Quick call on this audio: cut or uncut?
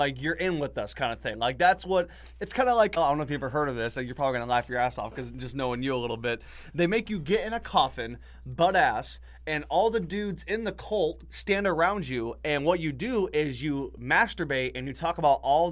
cut